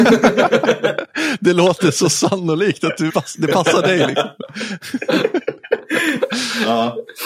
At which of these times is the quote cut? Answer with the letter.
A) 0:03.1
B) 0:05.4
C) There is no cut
A